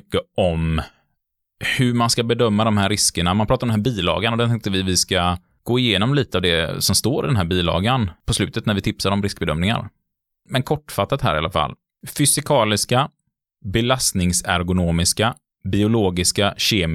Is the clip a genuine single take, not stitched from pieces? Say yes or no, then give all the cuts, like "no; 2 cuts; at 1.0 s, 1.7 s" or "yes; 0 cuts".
yes; 0 cuts